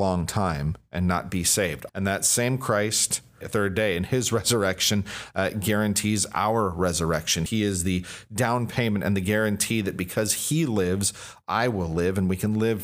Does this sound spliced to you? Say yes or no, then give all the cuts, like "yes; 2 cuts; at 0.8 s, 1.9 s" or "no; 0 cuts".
yes; 3 cuts; at 1.9 s, 3.4 s, 7.5 s